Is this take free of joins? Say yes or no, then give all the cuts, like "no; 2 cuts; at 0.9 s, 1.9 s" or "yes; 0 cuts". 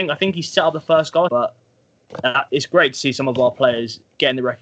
no; 2 cuts; at 1.3 s, 2.5 s